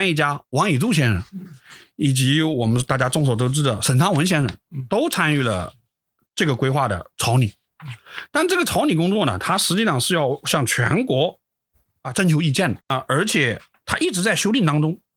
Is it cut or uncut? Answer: uncut